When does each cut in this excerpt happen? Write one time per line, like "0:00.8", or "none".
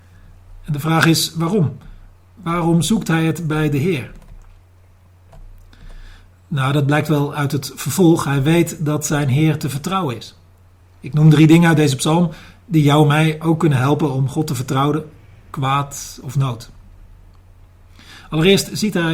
0:10.8
0:15.4